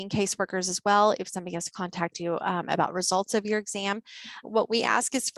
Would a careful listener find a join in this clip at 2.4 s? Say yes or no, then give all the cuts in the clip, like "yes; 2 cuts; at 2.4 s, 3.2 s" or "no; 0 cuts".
no; 1 cut; at 4.4 s